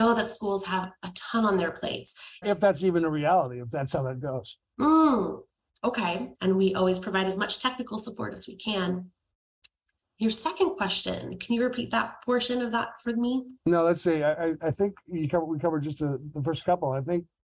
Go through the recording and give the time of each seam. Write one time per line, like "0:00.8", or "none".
0:02.4
0:06.3